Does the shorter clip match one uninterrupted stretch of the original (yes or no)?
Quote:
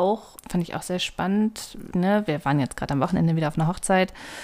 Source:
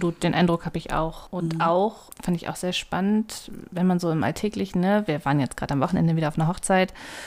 no